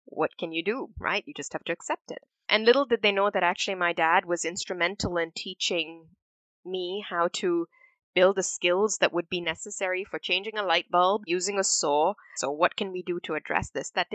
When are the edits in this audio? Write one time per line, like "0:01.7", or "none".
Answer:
0:02.4
0:11.3
0:12.4